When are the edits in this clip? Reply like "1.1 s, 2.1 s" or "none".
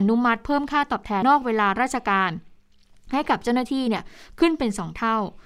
1.2 s